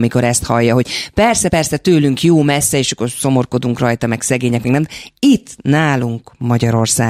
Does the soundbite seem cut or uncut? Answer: uncut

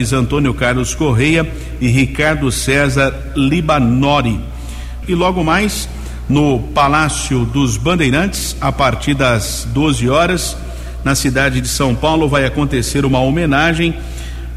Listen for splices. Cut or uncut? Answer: cut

